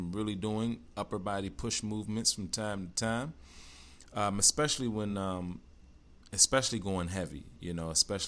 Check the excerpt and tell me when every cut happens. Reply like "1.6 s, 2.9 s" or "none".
none